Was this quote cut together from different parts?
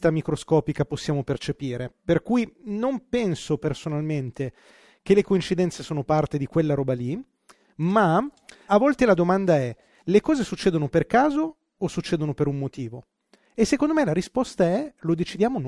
yes; 1 cut; at 8.7 s

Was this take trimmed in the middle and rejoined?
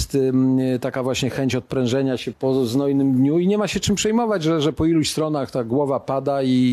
yes; 1 cut; at 2.3 s

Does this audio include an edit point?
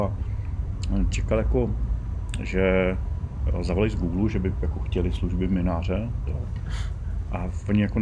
yes; 1 cut; at 6.3 s

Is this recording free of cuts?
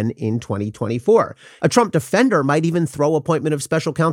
no; 1 cut; at 1.6 s

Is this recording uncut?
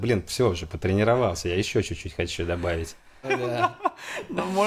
no; 1 cut; at 3.2 s

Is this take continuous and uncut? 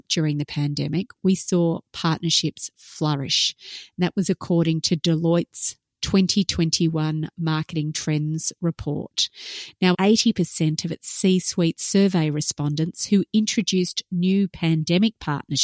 no; 1 cut; at 9.9 s

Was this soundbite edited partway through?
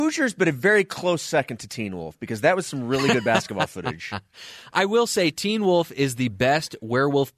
no; 0 cuts

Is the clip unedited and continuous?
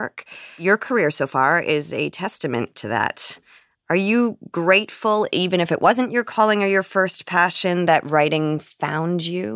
yes; 0 cuts

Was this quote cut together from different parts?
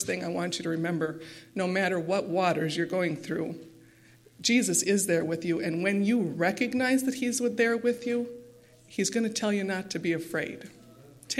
no; 0 cuts

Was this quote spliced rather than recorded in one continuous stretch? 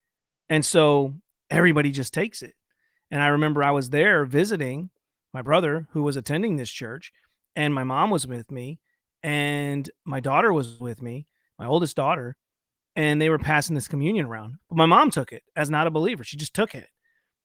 yes; 1 cut; at 14.6 s

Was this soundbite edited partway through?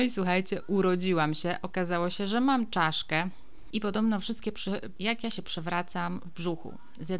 yes; 2 cuts; at 3.7 s, 5.0 s

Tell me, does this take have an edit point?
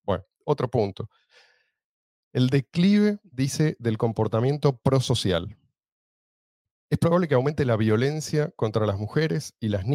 no; 0 cuts

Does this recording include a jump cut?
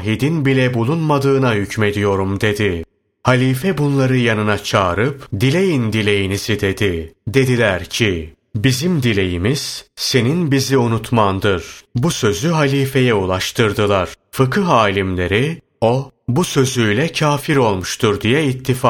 yes; 1 cut; at 11.9 s

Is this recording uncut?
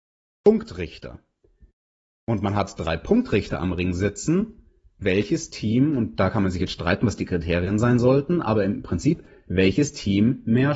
no; 1 cut; at 5.0 s

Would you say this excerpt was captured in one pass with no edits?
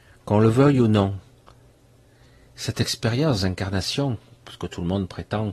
yes; 0 cuts

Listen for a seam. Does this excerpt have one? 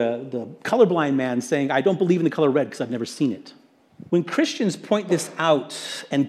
yes; 1 cut; at 4.1 s

